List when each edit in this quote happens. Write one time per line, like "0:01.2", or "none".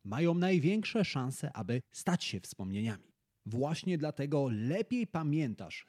none

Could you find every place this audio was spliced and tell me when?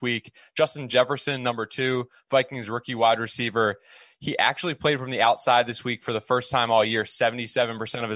none

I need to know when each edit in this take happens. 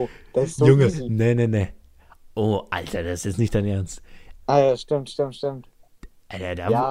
0:04.4

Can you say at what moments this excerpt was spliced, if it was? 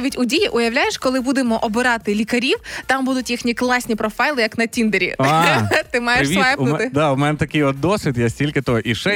none

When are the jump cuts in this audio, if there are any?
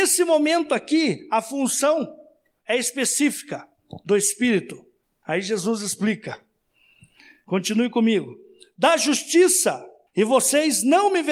0:05.2
0:10.1

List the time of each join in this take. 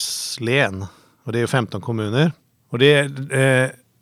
0:02.5

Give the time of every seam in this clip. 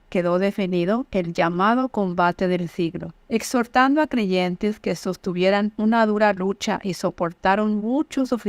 0:03.2

